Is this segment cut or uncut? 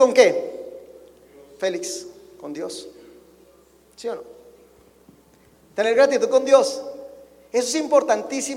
uncut